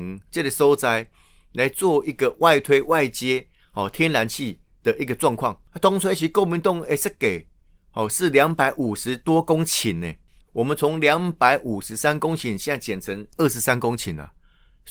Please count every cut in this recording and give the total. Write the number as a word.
one